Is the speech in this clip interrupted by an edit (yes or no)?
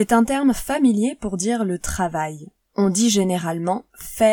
yes